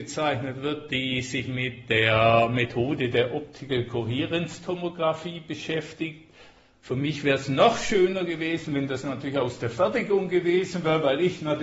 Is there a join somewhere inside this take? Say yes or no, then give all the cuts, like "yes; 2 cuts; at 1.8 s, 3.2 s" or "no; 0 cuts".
no; 0 cuts